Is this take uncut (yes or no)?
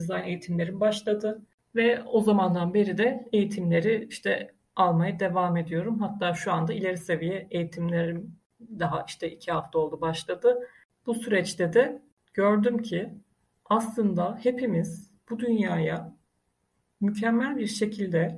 yes